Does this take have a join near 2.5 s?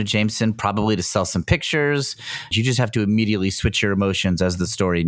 yes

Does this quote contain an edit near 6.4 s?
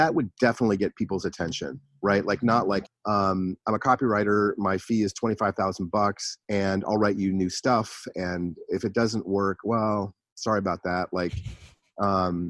yes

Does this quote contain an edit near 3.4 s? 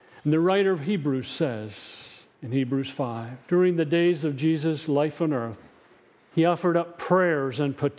yes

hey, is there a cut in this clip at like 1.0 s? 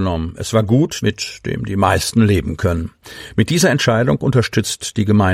yes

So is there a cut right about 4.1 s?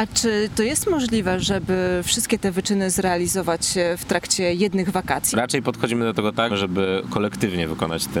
no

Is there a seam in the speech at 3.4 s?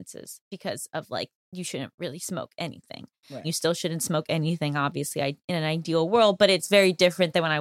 yes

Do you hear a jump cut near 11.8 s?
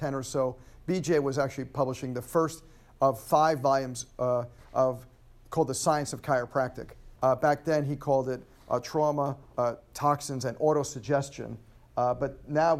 no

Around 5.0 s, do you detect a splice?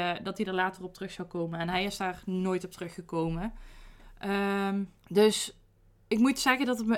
yes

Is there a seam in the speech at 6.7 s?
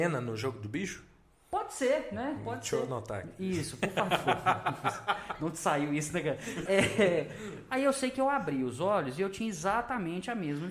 yes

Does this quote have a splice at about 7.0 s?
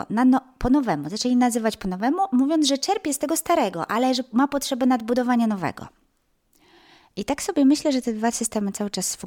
no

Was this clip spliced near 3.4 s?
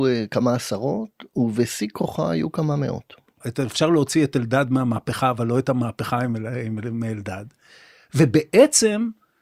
yes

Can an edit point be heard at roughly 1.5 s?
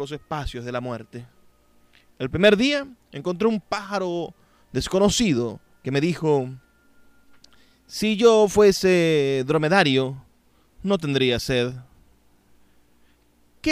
no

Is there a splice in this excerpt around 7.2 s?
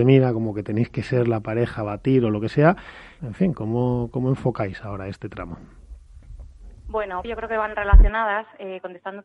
yes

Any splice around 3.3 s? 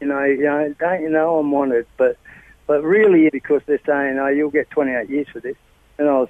yes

